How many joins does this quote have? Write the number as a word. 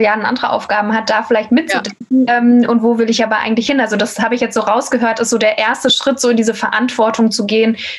one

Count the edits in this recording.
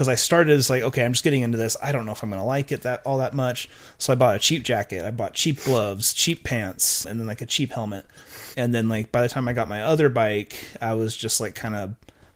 two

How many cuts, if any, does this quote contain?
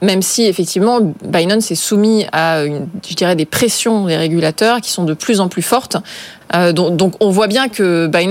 one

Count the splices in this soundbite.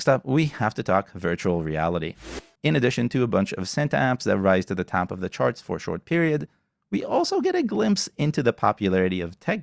one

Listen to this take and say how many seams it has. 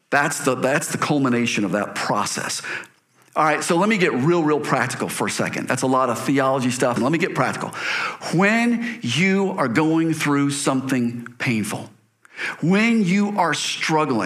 one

